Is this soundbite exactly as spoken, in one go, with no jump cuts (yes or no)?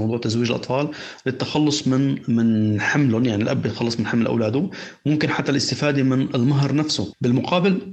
yes